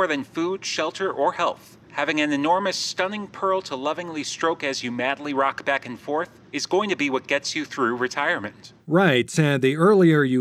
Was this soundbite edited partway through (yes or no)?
no